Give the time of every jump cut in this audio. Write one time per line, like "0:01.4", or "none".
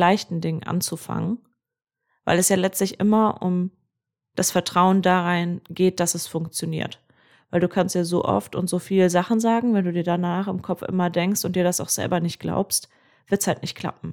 none

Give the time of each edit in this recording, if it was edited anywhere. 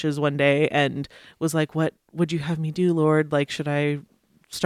none

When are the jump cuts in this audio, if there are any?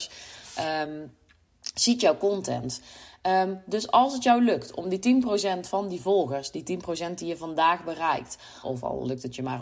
0:08.6

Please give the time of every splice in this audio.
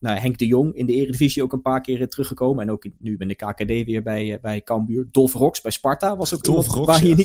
none

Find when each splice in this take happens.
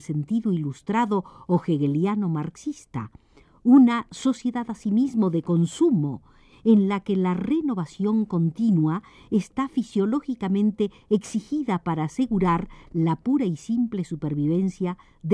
none

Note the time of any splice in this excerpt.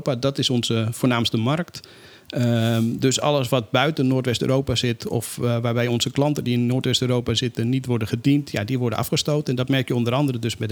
none

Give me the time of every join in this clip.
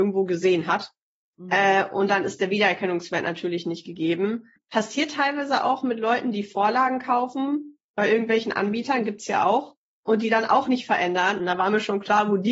0:11.4

